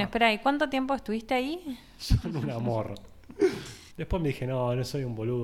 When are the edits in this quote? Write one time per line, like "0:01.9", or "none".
0:02.0
0:03.9